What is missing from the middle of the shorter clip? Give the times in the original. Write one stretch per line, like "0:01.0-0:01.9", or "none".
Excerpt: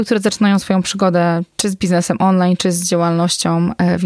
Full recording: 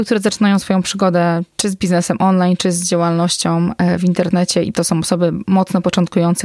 none